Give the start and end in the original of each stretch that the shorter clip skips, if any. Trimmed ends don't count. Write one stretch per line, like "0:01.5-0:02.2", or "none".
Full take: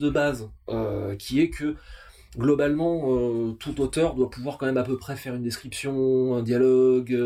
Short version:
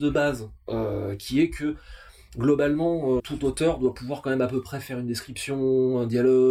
0:03.2-0:03.6

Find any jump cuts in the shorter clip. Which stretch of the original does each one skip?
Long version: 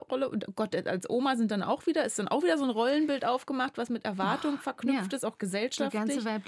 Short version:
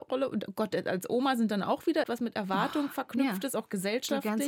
0:02.0-0:03.7

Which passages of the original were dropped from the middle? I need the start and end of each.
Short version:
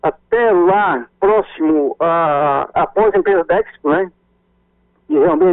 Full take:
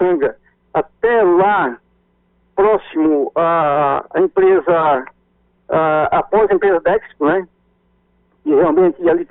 0:01.9-0:02.5
0:04.1-0:06.1

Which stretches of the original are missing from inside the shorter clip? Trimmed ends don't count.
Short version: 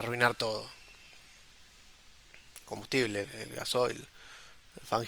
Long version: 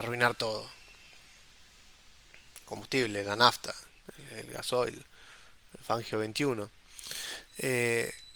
0:03.2-0:04.2

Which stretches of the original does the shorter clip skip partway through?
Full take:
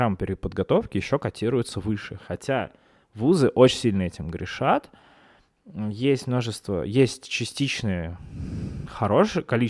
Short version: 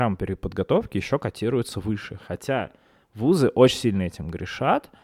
none

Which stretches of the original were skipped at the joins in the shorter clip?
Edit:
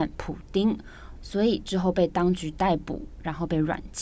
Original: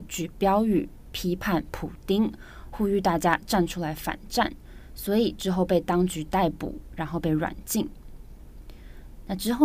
0:02.7-0:04.9

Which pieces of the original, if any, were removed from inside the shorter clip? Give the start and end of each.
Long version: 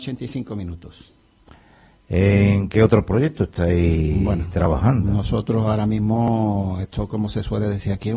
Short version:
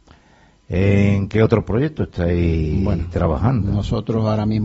none

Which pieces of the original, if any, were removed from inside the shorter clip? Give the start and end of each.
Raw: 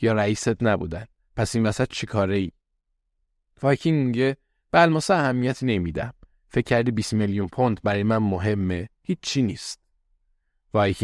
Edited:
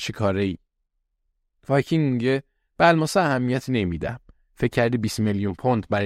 none

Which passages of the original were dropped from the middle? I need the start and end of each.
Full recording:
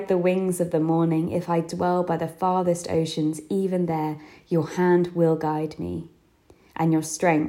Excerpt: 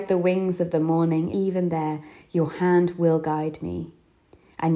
0:01.3-0:03.5

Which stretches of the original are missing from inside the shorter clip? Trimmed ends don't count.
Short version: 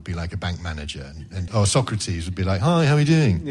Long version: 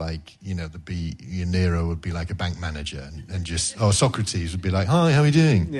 0:03.5-0:03.7

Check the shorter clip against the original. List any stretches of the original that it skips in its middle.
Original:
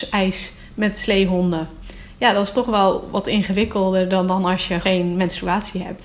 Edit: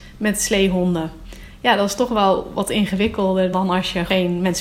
0:04.1-0:04.3

